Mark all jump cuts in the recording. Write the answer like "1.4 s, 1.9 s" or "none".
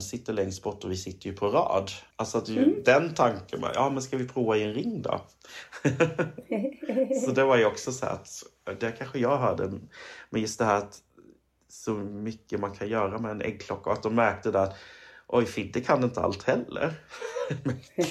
2.1 s